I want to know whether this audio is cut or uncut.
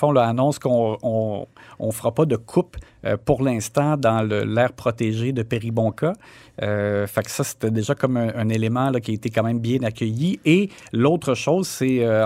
uncut